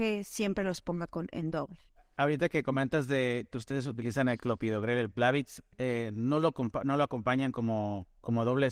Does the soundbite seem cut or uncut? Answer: cut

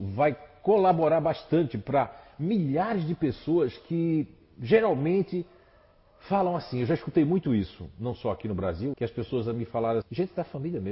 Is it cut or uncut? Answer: cut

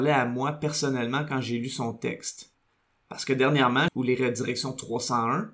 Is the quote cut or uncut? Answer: cut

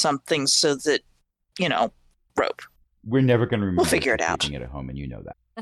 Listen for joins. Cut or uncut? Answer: uncut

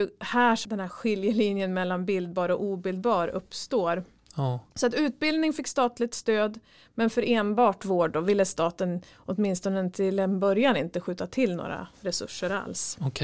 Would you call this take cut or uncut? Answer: uncut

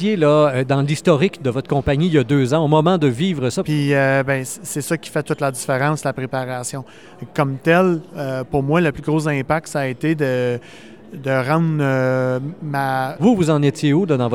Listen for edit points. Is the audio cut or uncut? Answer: cut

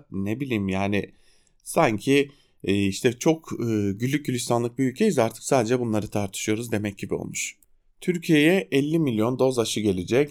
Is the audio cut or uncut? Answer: uncut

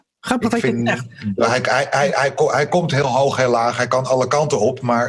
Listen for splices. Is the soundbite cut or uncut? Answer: uncut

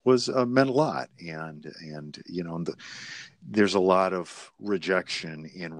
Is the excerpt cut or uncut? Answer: uncut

